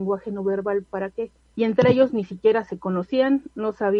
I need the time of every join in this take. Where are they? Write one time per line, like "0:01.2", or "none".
0:01.5